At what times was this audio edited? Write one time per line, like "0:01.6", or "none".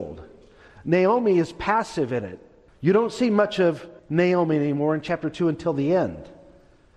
0:02.7
0:04.0